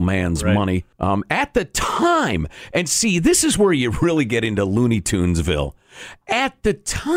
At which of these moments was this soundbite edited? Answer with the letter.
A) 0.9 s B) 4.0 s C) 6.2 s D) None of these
A